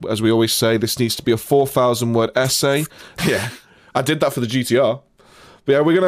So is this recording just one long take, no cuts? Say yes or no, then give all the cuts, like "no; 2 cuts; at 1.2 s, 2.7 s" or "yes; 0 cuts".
no; 1 cut; at 3.2 s